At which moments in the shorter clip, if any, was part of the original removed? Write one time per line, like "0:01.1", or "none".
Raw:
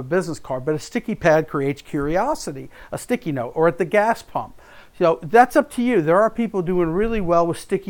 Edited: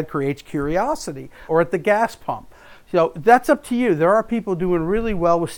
0:01.5